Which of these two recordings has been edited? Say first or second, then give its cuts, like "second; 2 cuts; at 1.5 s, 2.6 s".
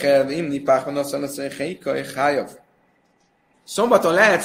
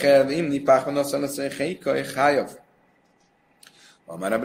first; 1 cut; at 3.5 s